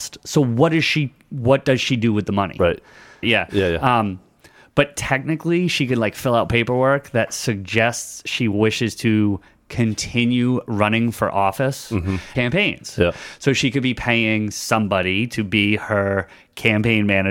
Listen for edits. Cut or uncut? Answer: cut